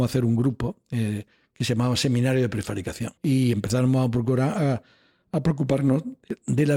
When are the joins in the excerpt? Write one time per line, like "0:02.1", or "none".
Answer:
0:03.2

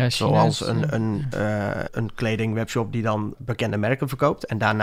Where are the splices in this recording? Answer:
0:01.9
0:03.3

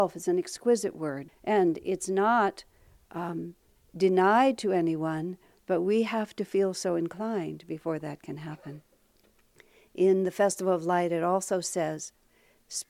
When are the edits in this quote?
0:01.3

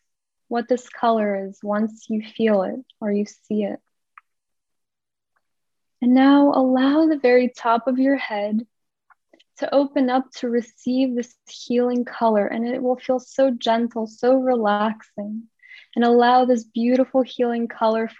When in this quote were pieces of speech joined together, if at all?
none

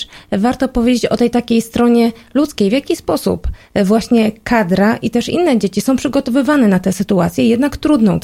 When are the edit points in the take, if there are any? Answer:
none

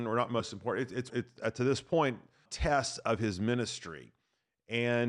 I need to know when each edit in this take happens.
0:01.1
0:02.5

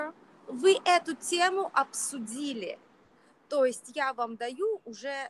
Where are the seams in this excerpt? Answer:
none

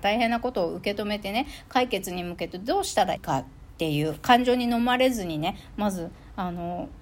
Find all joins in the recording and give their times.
0:03.2

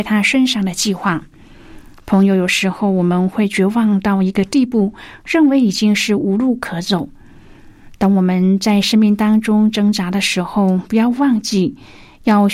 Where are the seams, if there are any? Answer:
none

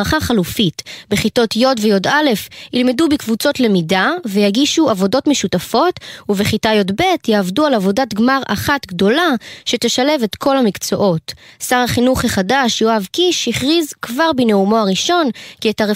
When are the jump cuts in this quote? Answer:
none

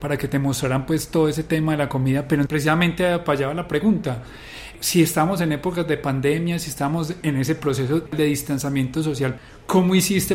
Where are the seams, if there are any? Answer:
0:02.4

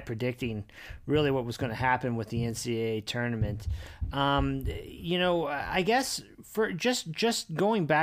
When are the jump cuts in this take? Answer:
none

